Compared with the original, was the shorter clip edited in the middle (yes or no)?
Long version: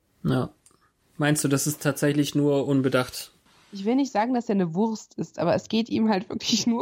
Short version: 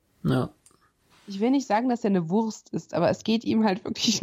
yes